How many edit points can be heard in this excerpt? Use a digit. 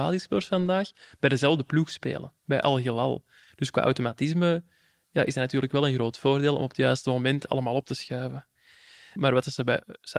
1